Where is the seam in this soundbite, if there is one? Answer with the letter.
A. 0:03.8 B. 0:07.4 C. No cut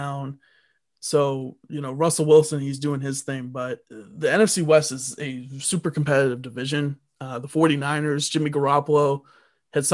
A